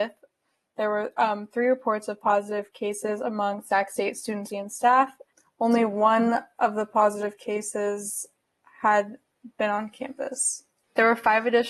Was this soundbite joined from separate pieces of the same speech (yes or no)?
yes